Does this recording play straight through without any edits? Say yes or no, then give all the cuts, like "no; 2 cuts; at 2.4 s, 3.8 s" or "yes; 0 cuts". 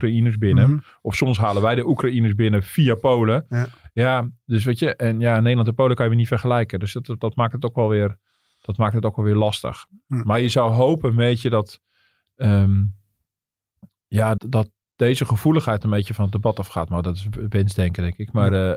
no; 1 cut; at 14.4 s